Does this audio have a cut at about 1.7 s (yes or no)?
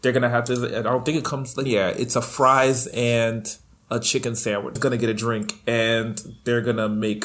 yes